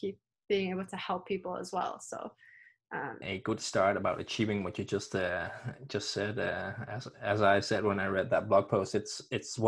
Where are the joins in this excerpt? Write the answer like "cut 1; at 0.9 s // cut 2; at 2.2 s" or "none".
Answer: cut 1; at 3.2 s